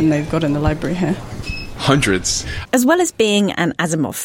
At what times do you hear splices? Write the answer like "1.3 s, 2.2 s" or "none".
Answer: 2.7 s